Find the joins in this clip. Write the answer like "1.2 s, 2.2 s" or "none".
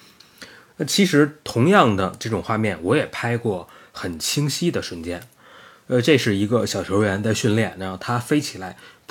none

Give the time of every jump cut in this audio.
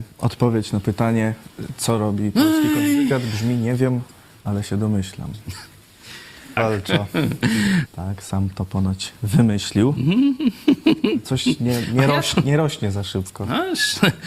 6.6 s, 7.9 s

